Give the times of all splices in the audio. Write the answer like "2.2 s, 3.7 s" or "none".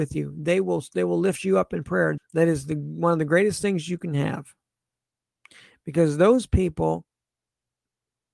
2.2 s